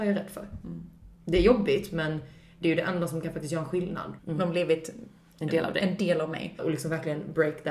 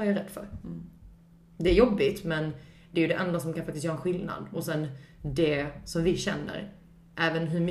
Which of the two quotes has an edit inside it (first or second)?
first